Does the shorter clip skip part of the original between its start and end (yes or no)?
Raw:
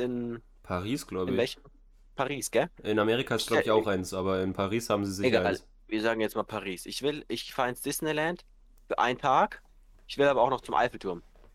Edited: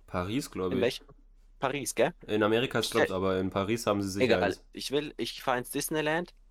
yes